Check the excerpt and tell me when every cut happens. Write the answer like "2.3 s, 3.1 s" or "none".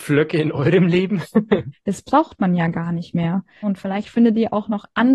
1.7 s, 3.6 s